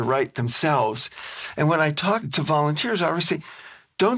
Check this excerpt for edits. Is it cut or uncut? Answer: cut